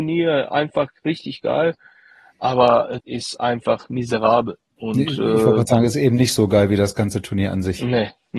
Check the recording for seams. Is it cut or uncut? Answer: cut